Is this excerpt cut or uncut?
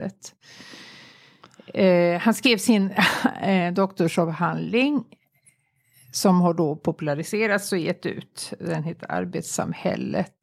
uncut